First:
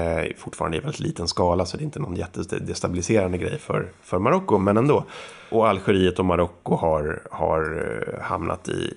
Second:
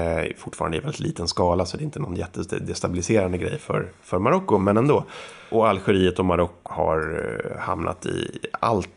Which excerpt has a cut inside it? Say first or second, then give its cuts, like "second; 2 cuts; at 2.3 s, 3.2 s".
second; 1 cut; at 6.7 s